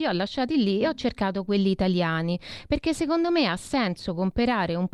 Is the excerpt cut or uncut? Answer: uncut